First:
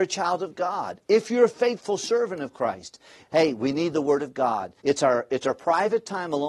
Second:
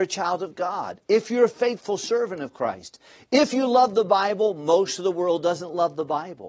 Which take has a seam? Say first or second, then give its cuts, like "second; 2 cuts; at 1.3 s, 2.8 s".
first; 2 cuts; at 3.2 s, 4.8 s